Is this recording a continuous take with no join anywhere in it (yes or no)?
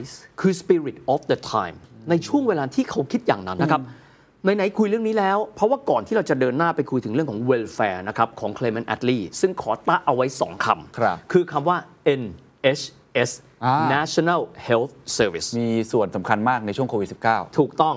no